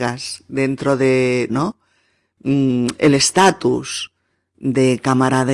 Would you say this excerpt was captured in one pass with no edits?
no; 1 cut; at 1.5 s

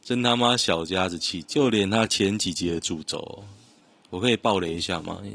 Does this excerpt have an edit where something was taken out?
no; 0 cuts

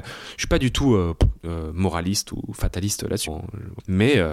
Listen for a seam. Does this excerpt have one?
yes; 1 cut; at 3.3 s

